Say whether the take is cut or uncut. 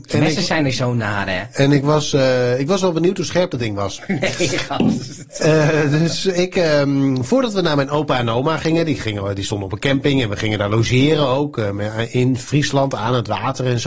uncut